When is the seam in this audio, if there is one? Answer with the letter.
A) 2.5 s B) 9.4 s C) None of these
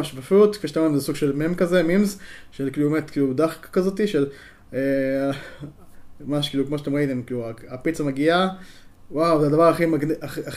C